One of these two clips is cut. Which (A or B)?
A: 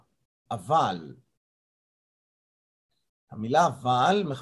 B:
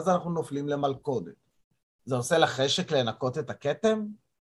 B